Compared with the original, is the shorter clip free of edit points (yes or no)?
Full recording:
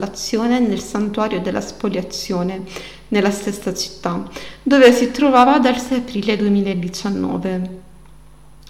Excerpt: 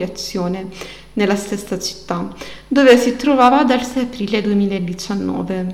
yes